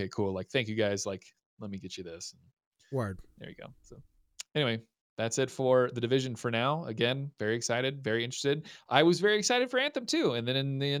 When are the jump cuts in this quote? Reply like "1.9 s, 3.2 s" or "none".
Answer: none